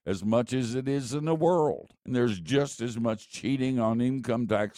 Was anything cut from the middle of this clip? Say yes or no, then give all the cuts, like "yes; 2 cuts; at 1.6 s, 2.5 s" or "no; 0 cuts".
yes; 1 cut; at 2.0 s